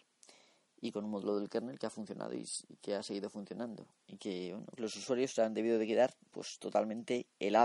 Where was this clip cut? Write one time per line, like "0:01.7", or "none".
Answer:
0:04.8